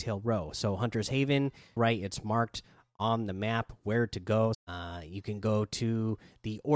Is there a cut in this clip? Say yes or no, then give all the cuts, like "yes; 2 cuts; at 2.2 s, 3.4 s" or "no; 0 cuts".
yes; 2 cuts; at 1.8 s, 4.5 s